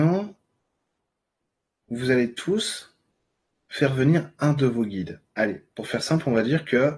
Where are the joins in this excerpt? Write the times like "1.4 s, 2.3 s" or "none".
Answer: none